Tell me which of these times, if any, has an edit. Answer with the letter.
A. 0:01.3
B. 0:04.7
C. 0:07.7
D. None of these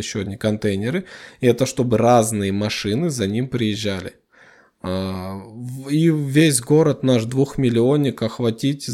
D